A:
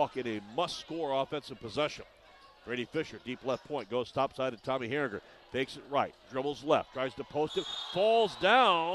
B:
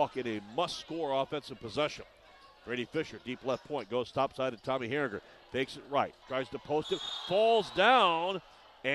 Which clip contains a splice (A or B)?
B